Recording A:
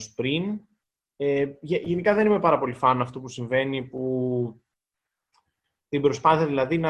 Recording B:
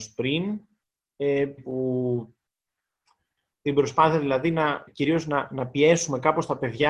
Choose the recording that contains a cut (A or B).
B